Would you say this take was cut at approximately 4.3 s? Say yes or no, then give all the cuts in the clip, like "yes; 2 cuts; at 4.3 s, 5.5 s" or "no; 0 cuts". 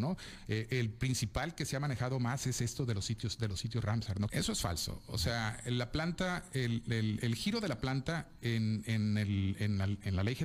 yes; 1 cut; at 4.3 s